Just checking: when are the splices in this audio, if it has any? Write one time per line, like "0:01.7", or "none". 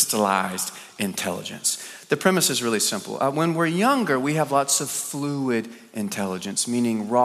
none